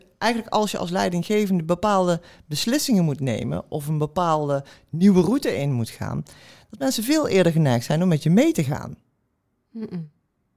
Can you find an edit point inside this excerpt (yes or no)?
no